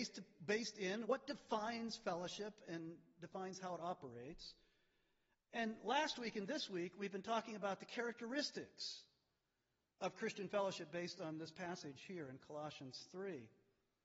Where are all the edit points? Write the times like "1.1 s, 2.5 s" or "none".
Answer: 1.0 s